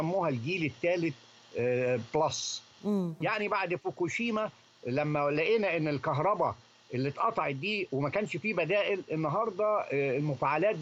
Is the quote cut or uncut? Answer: cut